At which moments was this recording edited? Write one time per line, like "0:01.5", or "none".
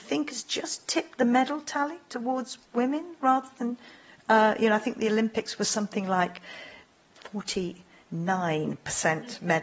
none